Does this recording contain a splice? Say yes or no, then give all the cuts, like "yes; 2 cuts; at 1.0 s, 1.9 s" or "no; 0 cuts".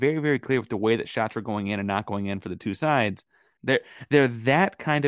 yes; 1 cut; at 3.6 s